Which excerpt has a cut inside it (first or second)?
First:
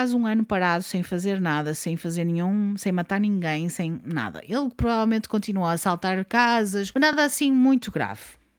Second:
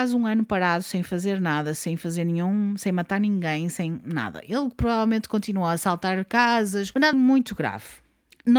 second